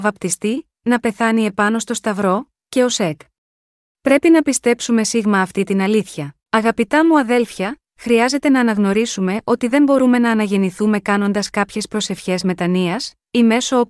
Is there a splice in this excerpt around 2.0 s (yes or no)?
no